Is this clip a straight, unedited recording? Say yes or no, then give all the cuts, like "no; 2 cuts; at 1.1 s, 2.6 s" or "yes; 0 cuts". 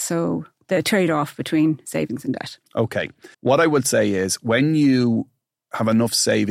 no; 1 cut; at 3.3 s